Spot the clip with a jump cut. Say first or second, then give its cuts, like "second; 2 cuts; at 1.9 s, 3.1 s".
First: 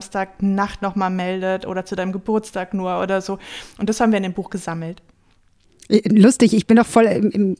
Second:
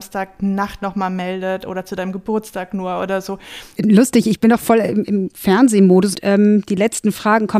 second; 2 cuts; at 3.8 s, 6.1 s